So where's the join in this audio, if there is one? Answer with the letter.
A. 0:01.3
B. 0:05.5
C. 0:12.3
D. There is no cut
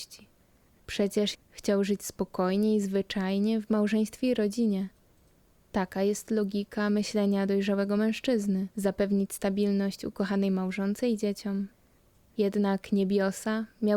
A